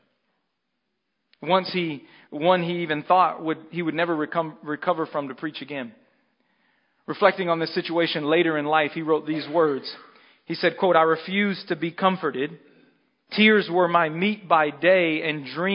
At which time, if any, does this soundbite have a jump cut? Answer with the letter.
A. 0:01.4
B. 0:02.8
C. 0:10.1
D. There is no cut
D